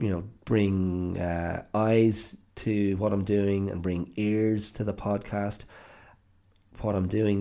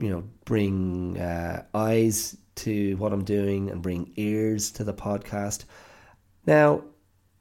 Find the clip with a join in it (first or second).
second